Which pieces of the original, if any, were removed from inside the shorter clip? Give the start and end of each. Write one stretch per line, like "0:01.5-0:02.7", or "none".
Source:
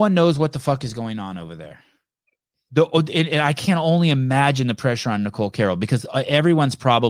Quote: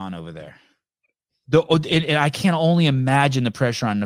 none

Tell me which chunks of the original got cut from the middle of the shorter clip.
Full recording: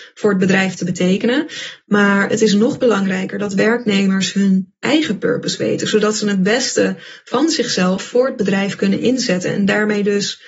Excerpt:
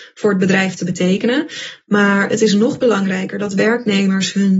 none

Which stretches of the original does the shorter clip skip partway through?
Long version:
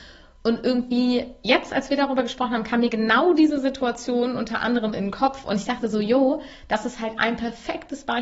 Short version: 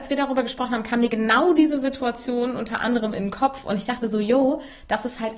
none

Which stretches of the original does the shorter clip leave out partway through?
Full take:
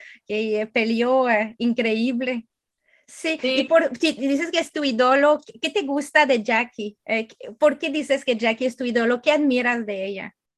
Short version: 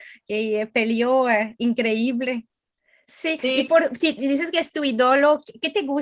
none

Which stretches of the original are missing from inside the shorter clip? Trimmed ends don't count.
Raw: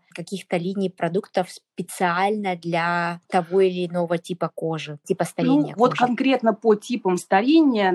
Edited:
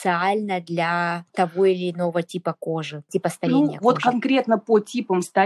none

